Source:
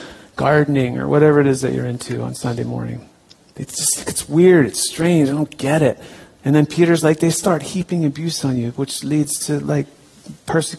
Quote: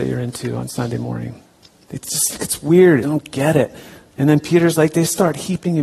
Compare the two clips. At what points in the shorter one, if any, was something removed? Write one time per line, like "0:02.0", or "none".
0:03.0